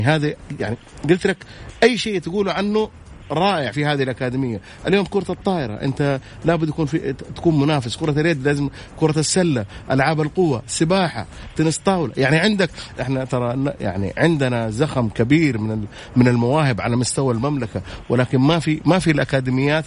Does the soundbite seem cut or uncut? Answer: cut